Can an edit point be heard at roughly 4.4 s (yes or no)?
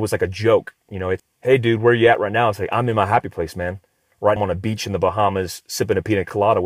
yes